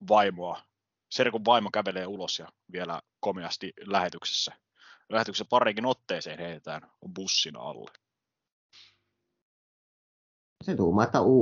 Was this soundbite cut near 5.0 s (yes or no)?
no